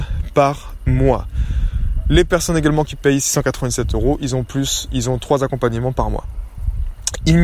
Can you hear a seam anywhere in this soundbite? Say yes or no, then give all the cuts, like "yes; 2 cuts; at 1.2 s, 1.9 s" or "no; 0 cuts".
no; 0 cuts